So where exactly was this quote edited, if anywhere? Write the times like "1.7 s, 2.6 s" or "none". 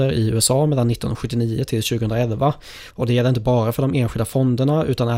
2.9 s